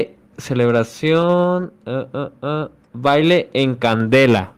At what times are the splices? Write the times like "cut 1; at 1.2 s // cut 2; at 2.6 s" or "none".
none